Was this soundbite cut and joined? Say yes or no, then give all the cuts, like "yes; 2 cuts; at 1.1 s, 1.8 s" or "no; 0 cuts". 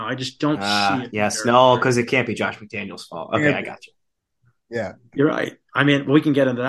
no; 0 cuts